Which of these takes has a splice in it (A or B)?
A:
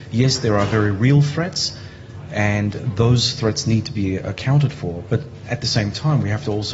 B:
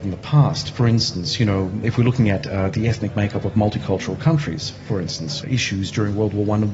B